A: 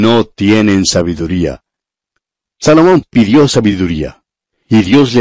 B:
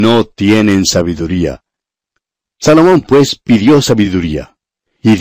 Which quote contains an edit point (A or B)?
A